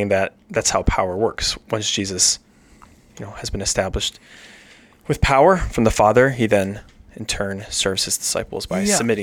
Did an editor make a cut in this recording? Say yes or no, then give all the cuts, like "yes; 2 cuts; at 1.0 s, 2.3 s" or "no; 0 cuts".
no; 0 cuts